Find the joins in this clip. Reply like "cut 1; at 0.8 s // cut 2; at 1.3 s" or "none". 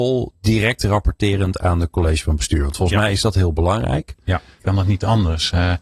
cut 1; at 4.6 s